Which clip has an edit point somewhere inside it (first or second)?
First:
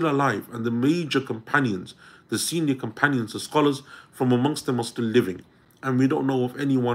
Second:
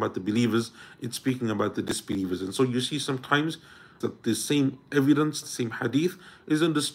second